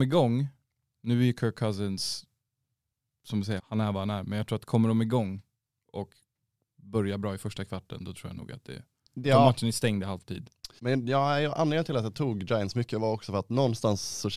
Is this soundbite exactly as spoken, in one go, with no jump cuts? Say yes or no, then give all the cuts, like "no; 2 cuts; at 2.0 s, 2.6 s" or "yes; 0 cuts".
no; 2 cuts; at 3.6 s, 10.8 s